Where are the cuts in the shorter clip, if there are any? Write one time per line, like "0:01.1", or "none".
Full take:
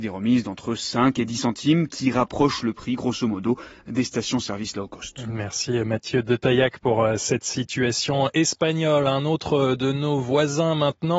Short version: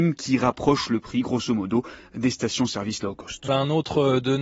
0:03.5